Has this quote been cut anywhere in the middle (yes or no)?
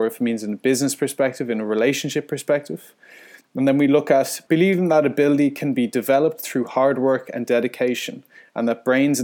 yes